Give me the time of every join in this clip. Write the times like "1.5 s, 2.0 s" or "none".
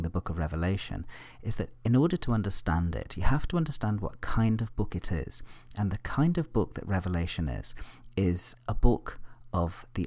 none